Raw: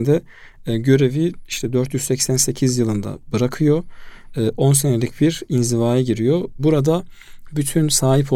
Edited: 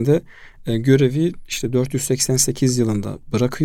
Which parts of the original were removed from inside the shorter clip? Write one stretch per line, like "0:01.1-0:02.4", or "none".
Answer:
none